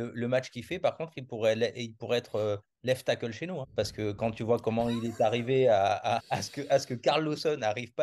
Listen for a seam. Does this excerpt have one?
yes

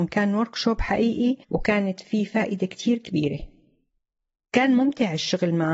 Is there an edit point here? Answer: yes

